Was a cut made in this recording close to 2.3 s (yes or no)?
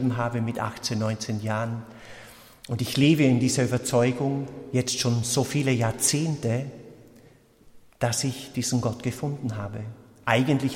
no